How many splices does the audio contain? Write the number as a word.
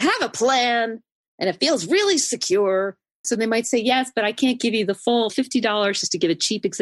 two